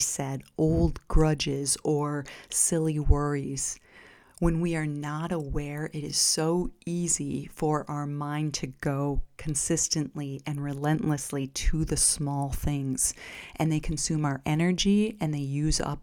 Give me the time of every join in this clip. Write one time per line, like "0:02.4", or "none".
none